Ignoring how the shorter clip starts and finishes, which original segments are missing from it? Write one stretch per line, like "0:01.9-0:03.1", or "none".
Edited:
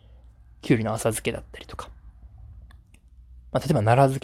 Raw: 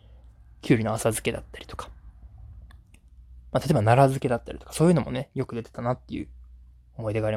none